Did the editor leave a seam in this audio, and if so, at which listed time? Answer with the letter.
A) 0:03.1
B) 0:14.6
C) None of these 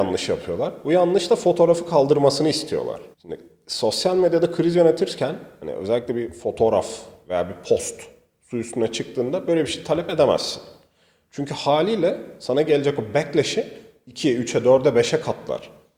A